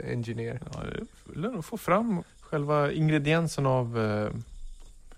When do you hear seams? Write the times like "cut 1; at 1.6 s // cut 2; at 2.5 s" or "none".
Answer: cut 1; at 2.2 s